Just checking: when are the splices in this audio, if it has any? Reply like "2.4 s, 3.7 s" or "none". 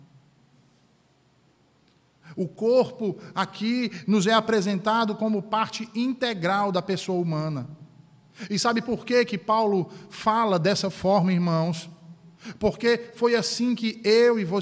none